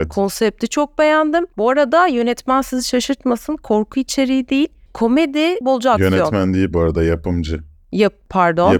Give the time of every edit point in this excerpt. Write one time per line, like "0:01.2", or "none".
0:05.6